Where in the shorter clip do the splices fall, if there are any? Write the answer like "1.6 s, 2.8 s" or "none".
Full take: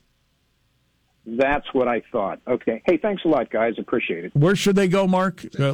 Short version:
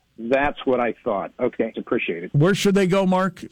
1.7 s